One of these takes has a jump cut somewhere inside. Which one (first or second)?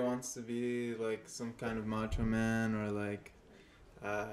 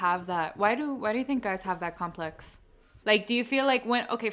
second